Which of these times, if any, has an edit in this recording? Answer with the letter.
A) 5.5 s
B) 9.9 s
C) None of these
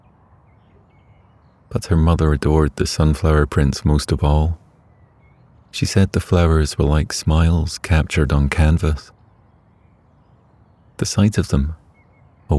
C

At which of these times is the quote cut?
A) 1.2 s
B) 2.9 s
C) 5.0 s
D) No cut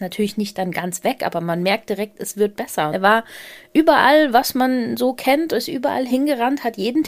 B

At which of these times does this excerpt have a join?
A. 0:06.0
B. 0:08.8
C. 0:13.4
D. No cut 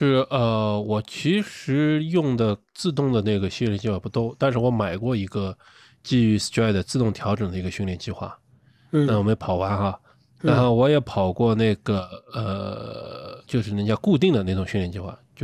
C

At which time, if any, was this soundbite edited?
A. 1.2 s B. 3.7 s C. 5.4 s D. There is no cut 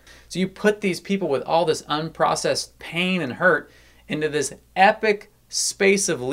D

